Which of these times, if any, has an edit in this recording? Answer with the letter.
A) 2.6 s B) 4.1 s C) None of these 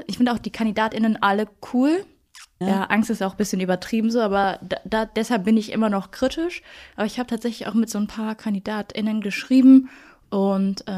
A